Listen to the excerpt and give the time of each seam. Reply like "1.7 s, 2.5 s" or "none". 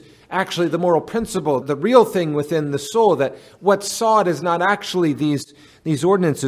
1.6 s